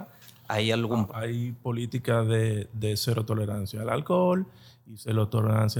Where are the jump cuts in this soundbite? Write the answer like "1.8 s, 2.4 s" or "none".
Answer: 1.1 s